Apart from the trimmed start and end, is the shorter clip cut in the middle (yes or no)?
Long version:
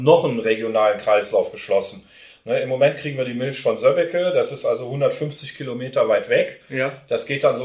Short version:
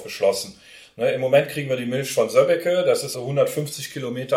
yes